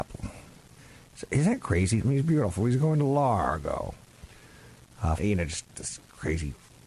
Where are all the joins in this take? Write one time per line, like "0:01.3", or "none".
0:02.0
0:05.2